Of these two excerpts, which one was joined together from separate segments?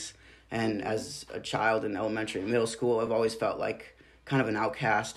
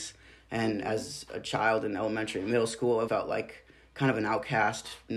second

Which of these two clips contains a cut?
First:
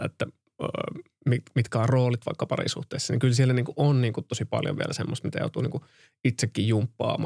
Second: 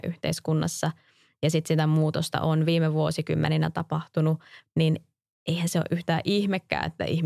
second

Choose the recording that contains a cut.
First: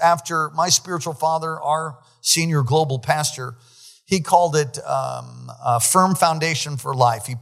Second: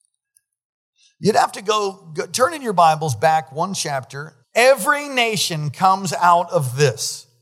second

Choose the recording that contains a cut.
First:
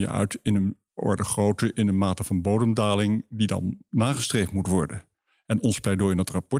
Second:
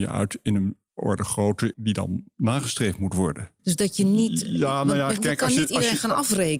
second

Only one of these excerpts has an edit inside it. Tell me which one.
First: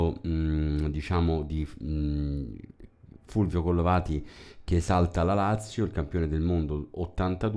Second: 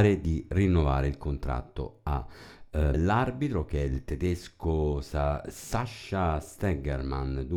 second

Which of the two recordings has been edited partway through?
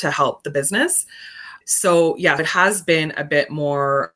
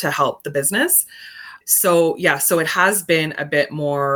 first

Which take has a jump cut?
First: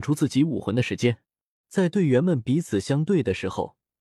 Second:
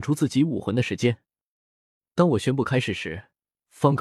first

